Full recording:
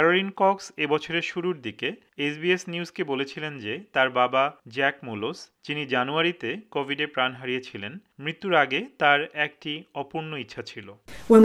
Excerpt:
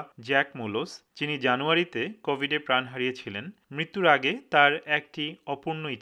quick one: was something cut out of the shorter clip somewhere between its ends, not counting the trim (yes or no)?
no